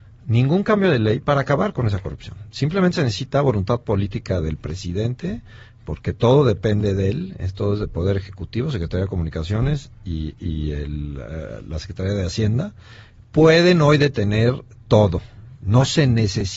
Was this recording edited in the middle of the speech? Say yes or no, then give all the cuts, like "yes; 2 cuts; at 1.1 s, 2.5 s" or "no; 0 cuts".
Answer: no; 0 cuts